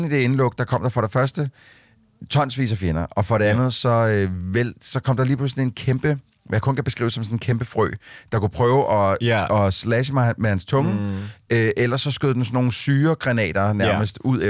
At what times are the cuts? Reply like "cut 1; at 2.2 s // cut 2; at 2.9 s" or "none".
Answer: none

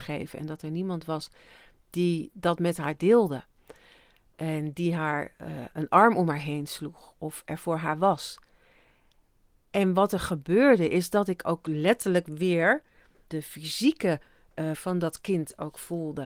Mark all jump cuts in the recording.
cut 1; at 13.3 s // cut 2; at 14.7 s

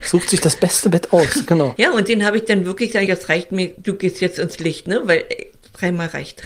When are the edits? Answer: cut 1; at 1.8 s // cut 2; at 3.1 s

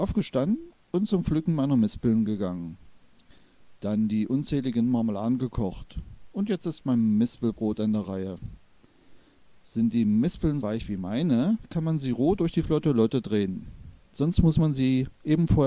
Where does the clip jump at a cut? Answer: cut 1; at 10.6 s

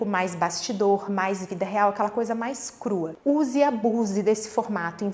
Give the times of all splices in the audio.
none

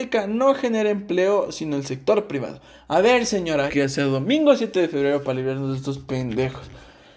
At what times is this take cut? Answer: cut 1; at 3.7 s

